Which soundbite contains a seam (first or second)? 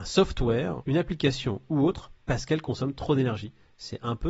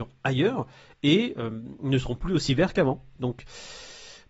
second